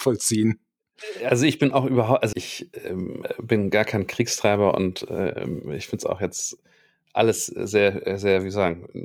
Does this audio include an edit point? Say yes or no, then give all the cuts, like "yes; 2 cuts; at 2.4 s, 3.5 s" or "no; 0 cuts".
yes; 1 cut; at 2.3 s